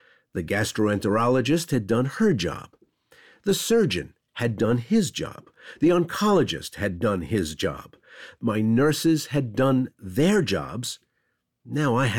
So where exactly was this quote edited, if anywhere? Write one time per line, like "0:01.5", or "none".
none